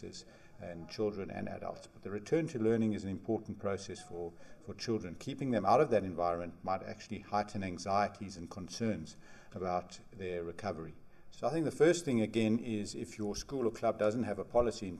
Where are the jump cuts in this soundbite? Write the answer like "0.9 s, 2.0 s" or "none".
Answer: 11.3 s